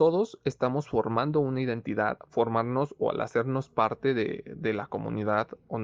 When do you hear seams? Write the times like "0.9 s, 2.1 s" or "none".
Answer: none

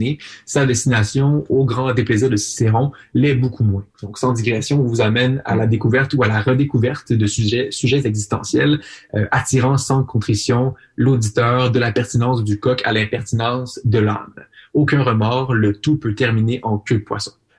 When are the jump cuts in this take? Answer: 3.9 s

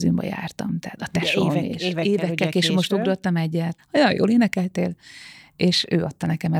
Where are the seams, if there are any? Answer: 3.8 s

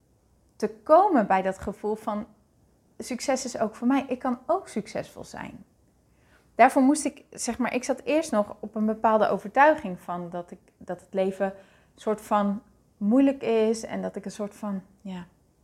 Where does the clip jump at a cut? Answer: none

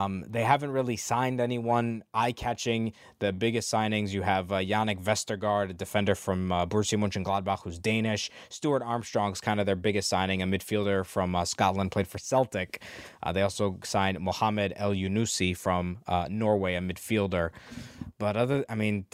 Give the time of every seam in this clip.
none

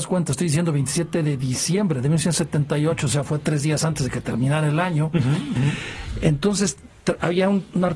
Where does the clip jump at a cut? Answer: none

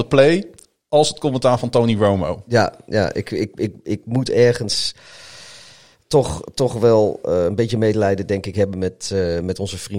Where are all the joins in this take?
none

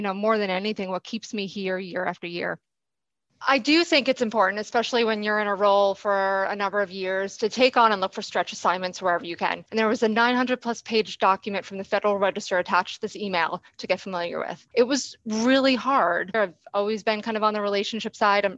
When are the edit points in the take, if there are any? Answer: 9.7 s, 14.7 s, 16.3 s

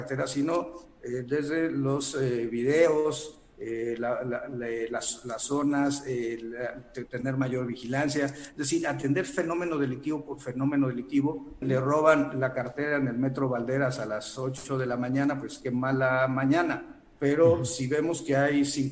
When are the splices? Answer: 11.6 s

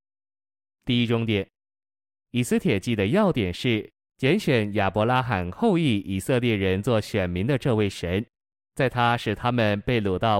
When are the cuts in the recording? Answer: none

